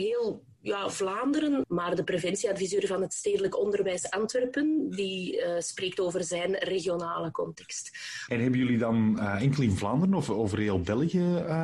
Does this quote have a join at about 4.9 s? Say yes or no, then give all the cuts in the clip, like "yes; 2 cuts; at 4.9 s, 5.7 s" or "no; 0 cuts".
no; 2 cuts; at 1.6 s, 8.3 s